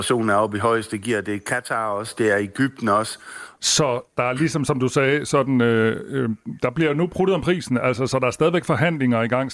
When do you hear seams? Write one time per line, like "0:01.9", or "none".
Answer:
0:03.6